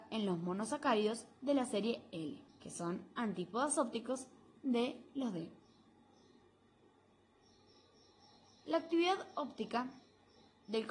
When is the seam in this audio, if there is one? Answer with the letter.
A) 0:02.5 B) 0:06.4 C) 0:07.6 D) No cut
A